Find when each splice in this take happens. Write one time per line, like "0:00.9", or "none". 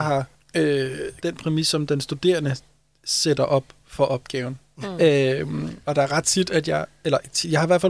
0:01.2
0:04.8